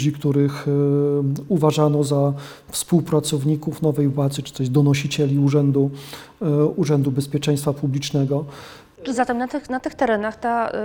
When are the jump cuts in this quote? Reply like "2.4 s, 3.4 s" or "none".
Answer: none

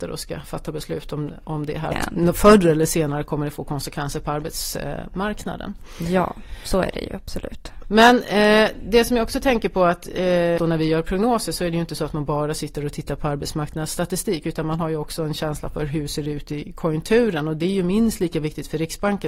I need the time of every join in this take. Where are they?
1.9 s, 7.8 s, 10.6 s

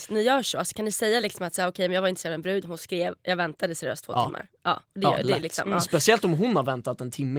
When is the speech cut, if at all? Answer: none

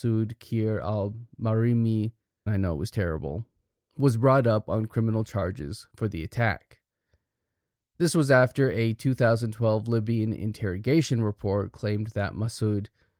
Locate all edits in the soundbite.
2.5 s

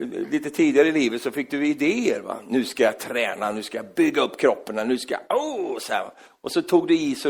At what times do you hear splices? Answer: none

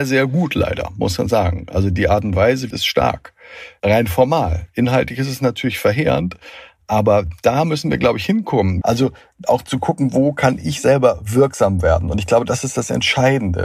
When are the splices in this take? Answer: 2.7 s, 8.8 s

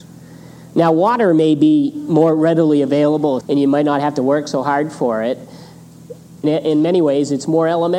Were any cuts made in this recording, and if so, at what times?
3.4 s, 6.4 s

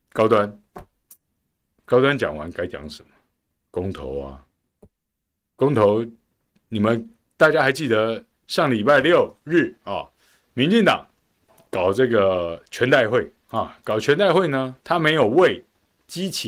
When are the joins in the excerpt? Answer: 10.5 s, 14.8 s

